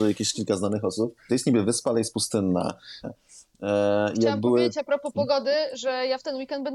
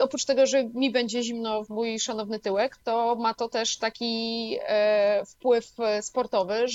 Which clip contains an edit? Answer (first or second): first